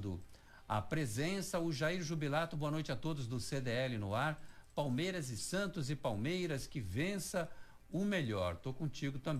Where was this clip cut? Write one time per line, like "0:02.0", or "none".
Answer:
0:05.4